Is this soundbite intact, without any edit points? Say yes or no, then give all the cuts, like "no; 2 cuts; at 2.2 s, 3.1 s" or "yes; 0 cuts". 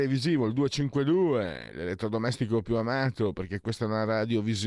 yes; 0 cuts